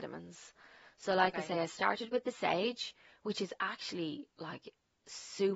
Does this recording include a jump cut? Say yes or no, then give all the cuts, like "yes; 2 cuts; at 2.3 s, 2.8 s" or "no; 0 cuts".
no; 0 cuts